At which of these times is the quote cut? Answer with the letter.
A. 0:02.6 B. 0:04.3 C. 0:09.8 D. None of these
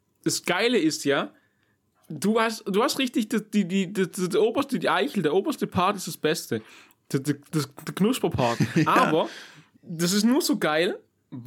C